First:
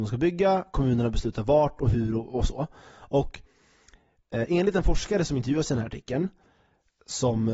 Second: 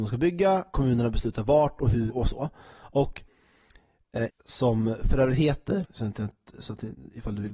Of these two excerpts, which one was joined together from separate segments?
second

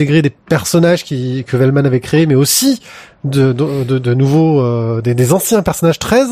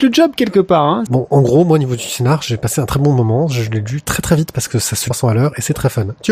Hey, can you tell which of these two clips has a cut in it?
second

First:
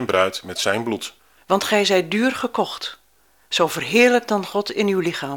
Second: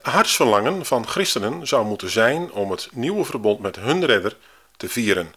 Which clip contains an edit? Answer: first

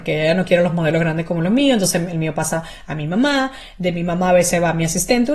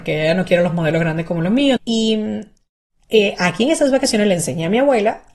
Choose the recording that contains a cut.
second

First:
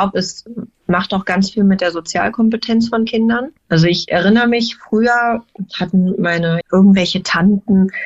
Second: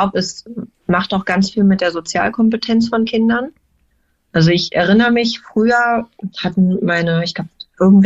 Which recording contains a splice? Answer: first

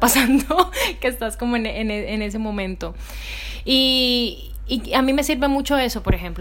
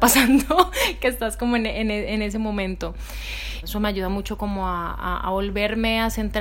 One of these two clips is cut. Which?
second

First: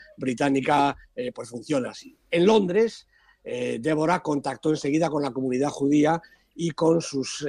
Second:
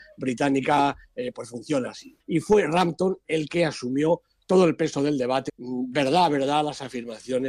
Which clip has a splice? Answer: second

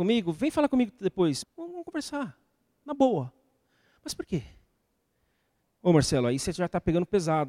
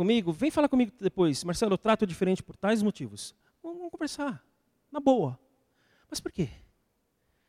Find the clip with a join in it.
first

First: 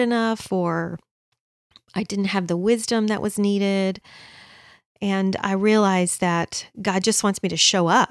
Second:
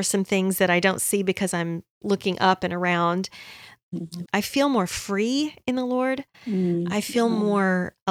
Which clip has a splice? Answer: second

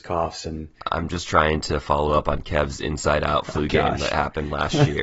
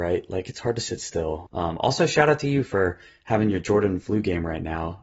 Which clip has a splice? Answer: second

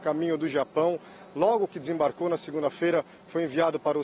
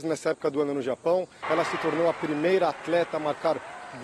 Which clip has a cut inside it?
second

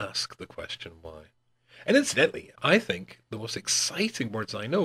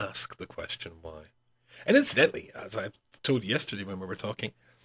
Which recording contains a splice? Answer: first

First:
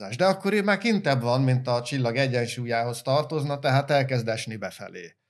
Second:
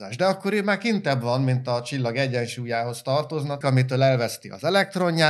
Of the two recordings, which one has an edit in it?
second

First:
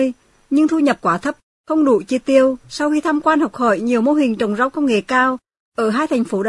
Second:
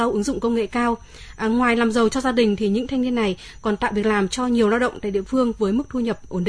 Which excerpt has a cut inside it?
first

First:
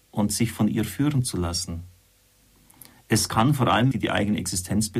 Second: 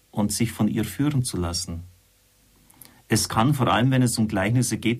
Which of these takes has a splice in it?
first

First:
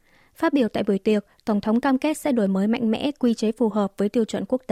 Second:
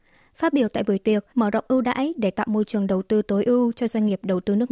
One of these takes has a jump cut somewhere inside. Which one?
second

